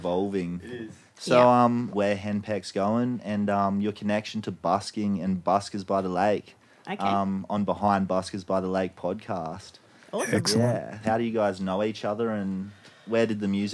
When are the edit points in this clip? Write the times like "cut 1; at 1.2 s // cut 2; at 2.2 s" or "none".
cut 1; at 1.9 s // cut 2; at 11.0 s